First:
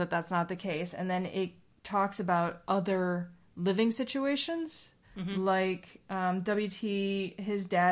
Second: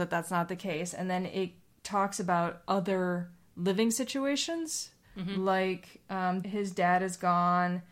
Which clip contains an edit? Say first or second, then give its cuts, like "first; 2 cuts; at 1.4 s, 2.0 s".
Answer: second; 1 cut; at 6.4 s